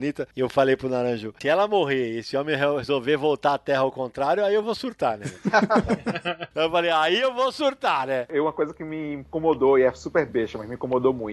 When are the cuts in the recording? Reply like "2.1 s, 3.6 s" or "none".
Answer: none